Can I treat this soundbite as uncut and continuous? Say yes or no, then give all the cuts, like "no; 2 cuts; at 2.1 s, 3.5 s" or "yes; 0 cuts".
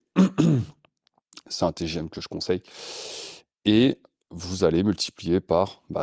yes; 0 cuts